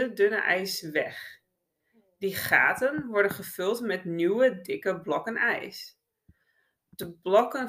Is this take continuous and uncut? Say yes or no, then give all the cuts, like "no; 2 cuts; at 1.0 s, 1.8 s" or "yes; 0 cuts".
yes; 0 cuts